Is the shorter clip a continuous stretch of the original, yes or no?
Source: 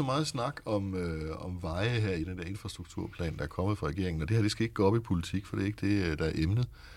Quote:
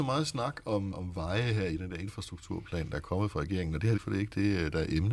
no